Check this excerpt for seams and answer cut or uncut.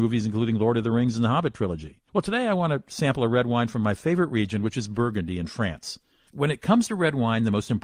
cut